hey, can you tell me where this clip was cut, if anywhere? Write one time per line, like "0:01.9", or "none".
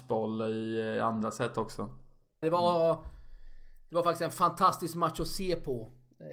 0:02.4